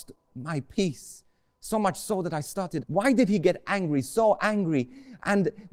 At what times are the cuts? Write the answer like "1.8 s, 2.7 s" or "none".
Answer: 2.8 s